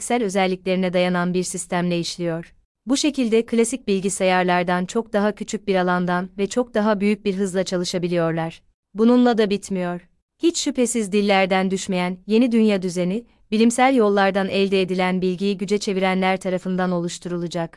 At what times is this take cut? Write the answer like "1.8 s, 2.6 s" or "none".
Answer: 10.2 s